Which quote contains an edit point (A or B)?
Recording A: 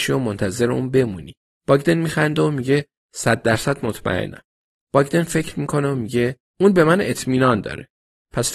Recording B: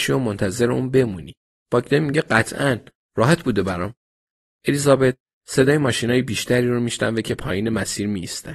A